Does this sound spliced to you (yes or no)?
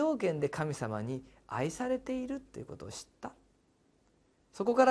no